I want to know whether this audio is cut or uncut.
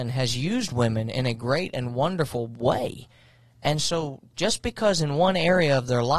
uncut